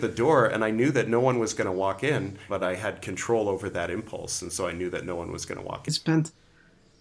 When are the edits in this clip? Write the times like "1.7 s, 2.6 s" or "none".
2.5 s, 5.9 s